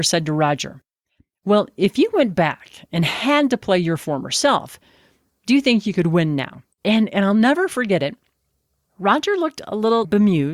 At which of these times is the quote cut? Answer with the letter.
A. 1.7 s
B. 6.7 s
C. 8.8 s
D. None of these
B